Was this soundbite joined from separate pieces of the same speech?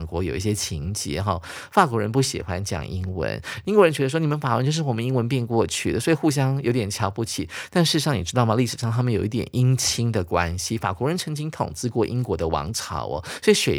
no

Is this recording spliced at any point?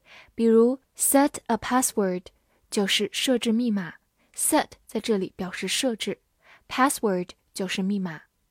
no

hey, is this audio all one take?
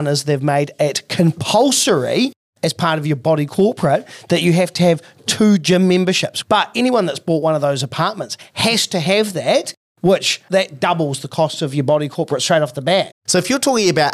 no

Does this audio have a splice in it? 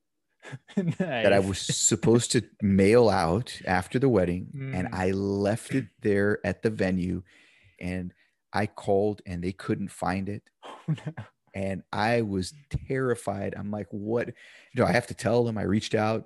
yes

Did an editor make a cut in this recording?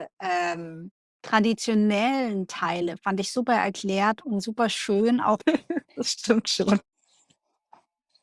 yes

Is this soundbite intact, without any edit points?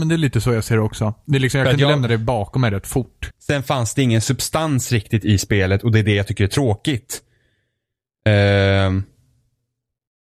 no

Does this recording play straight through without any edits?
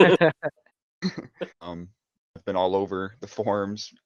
no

